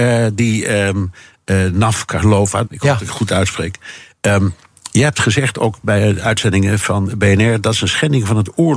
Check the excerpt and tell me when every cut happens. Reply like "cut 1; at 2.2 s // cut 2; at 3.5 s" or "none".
cut 1; at 2.6 s

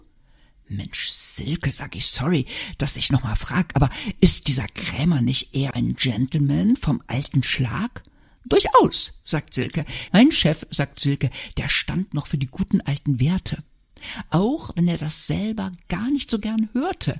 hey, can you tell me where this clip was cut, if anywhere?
cut 1; at 5.7 s // cut 2; at 10.1 s

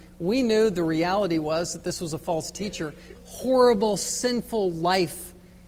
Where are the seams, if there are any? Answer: cut 1; at 3.2 s

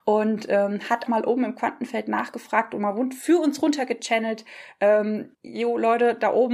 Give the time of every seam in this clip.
cut 1; at 1.1 s // cut 2; at 5.3 s

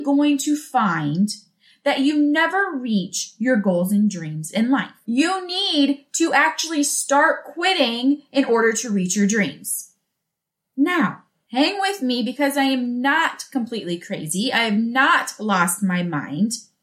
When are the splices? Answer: cut 1; at 5.0 s

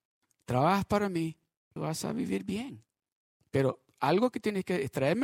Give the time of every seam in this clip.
cut 1; at 1.8 s

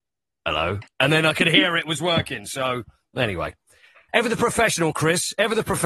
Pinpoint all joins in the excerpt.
none

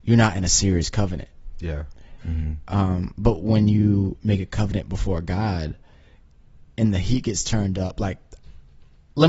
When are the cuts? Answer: cut 1; at 2.2 s

